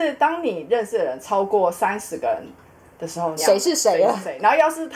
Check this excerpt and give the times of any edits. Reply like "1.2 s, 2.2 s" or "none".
3.4 s